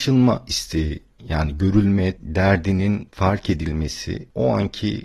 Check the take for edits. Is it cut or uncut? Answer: cut